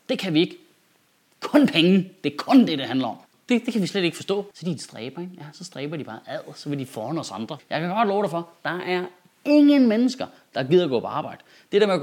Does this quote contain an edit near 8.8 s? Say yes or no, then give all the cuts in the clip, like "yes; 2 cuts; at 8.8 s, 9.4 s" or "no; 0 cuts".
no; 3 cuts; at 3.3 s, 4.5 s, 7.6 s